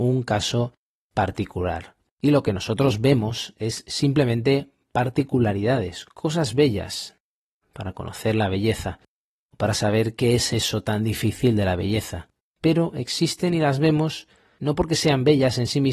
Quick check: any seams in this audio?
yes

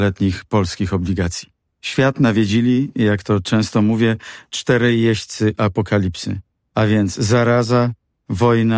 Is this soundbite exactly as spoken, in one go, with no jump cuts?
yes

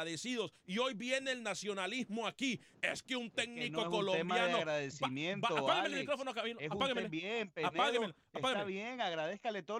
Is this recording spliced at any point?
no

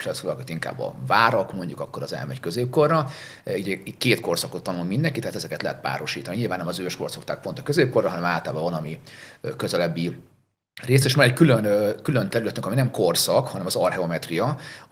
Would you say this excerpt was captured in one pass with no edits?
yes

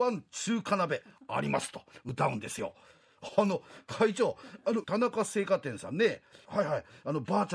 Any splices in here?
yes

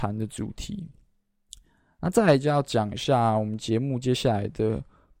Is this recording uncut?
yes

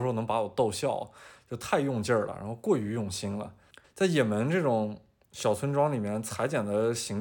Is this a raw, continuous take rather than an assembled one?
no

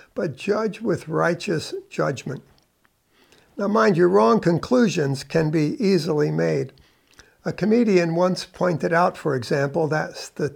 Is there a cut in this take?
no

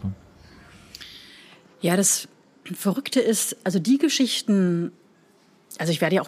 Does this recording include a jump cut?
no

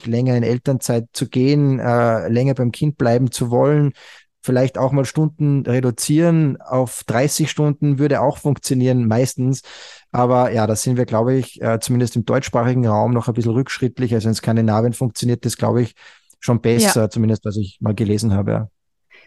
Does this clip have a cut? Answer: no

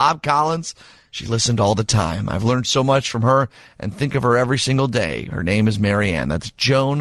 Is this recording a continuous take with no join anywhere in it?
yes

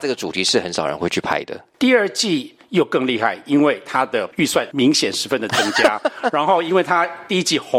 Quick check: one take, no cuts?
yes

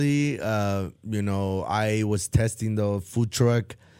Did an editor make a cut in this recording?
no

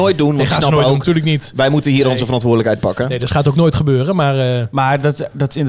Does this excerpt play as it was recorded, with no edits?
yes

